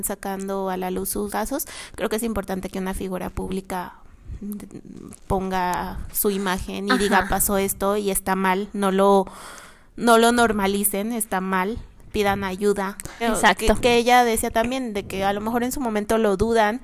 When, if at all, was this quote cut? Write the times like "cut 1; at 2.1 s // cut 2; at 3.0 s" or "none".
cut 1; at 1.3 s // cut 2; at 13.2 s